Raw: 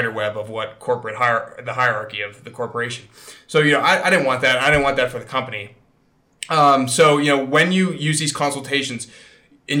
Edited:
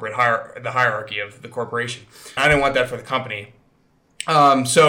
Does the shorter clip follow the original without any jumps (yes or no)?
no